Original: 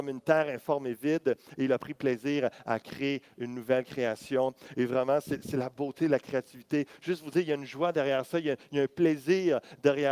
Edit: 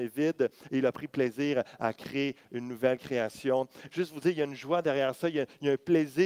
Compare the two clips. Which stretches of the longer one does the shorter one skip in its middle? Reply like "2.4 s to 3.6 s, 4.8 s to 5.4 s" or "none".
4.7 s to 7.0 s